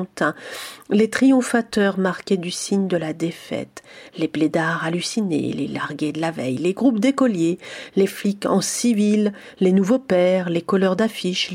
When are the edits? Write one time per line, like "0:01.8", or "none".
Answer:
none